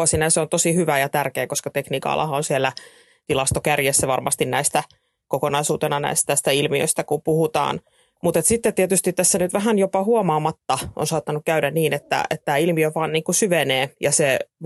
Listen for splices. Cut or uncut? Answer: uncut